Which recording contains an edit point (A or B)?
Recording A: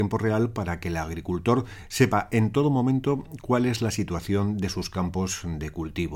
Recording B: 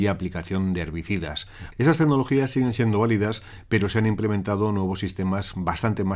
B